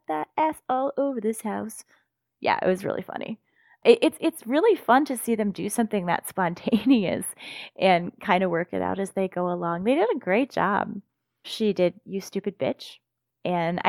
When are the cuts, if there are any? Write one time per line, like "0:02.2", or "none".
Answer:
0:11.4